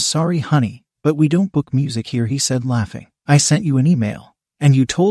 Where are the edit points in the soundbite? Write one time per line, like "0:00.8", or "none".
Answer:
0:03.3